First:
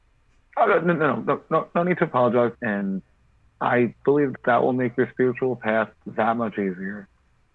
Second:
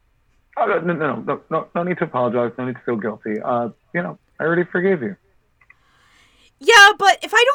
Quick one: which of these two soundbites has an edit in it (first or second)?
first